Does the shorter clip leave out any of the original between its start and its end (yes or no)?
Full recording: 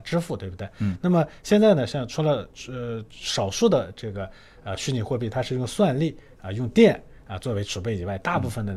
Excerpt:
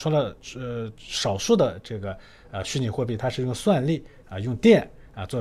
no